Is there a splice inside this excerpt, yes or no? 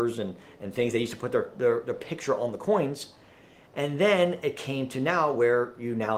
no